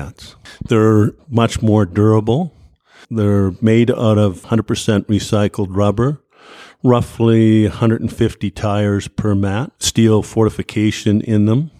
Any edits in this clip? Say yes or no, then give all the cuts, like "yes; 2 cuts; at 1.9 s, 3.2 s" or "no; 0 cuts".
yes; 1 cut; at 9.7 s